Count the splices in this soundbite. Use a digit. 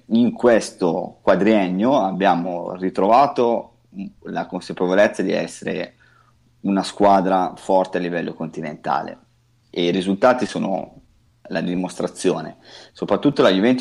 0